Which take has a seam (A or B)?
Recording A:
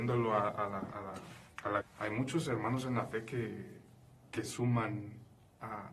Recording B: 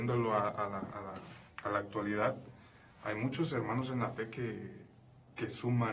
A